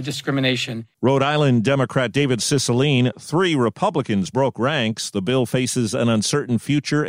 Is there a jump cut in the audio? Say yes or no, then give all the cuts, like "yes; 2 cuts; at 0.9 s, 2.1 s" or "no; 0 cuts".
no; 0 cuts